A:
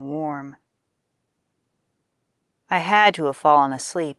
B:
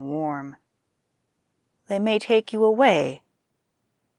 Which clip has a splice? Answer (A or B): B